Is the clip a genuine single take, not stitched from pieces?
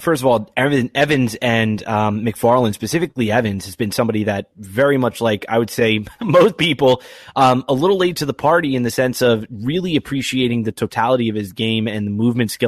yes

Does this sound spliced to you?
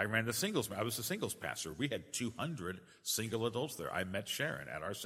no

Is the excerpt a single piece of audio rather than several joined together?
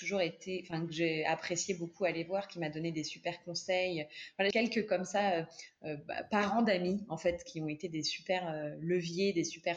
no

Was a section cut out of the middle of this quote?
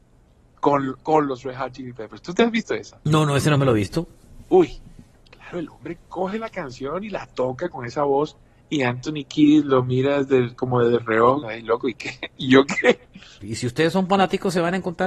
yes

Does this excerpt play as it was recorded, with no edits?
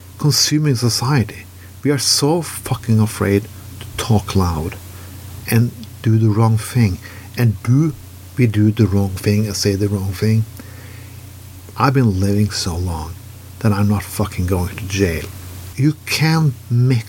no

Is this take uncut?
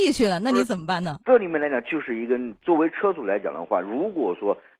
yes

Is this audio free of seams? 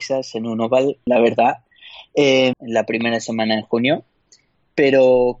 no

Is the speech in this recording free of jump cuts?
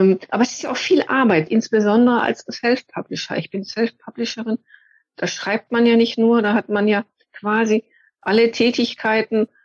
no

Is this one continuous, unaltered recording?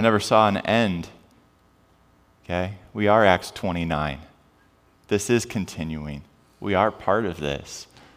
yes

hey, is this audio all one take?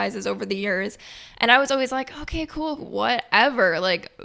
no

